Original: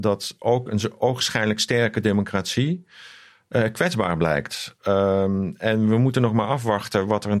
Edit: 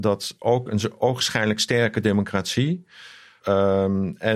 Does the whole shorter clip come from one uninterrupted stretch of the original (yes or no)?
no